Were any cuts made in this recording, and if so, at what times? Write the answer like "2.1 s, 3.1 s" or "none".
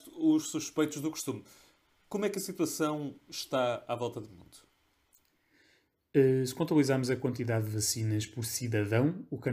none